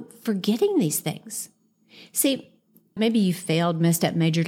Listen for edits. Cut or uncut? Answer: cut